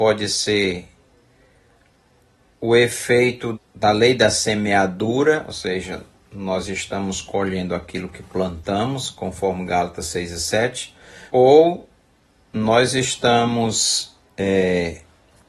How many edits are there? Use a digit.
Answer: 2